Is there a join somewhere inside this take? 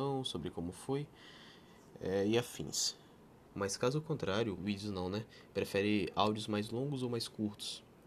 yes; 2 cuts; at 3.5 s, 4.6 s

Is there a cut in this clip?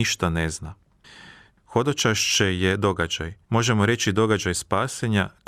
yes; 2 cuts; at 1.5 s, 3.4 s

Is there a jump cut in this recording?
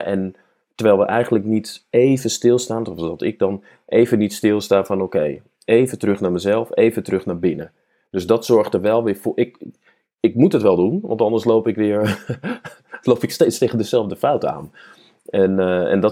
no; 0 cuts

